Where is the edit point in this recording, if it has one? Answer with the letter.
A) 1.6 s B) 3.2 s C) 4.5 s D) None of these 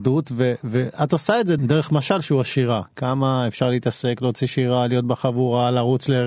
A